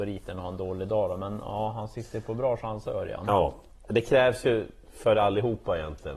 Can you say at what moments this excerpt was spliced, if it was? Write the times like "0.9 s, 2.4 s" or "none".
none

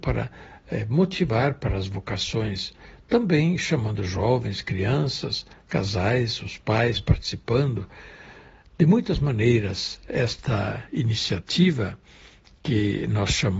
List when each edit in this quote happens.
none

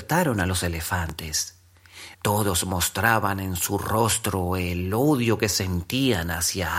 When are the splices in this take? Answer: 2.1 s

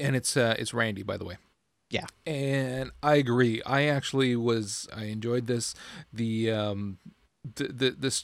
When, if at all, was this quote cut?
4.9 s

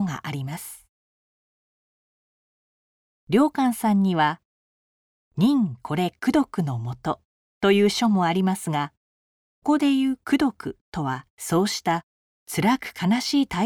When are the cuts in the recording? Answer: 9.6 s, 11.3 s

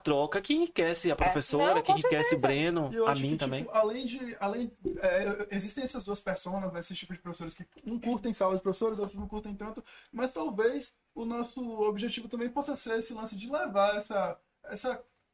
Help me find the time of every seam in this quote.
none

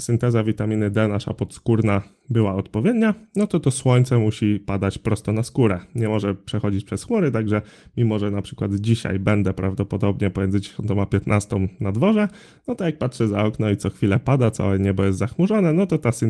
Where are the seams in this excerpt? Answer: none

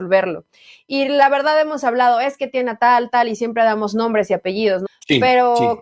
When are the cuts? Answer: 4.9 s

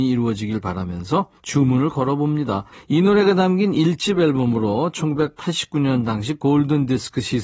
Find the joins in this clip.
1.4 s, 2.7 s

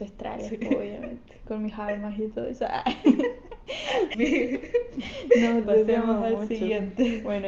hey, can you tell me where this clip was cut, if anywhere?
4.1 s, 5.6 s

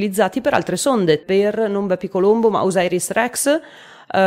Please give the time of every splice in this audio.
1.2 s

